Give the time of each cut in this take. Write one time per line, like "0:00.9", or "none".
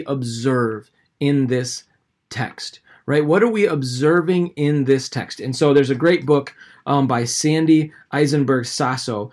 0:05.4